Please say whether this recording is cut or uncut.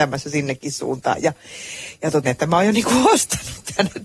cut